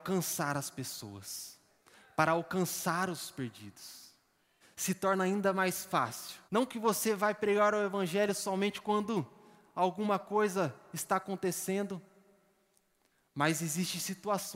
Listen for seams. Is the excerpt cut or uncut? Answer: cut